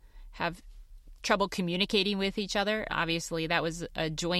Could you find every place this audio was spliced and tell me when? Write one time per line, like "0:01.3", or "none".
0:02.9